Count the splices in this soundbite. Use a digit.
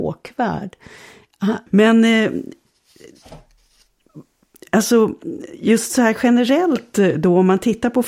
1